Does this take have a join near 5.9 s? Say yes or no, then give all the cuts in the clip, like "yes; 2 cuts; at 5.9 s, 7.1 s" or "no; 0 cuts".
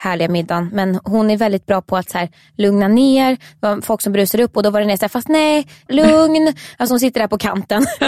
yes; 1 cut; at 5.9 s